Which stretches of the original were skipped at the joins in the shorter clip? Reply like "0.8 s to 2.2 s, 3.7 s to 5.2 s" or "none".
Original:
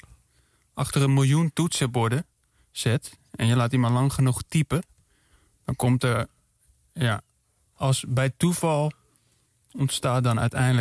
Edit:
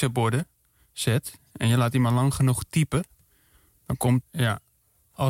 6.0 s to 6.8 s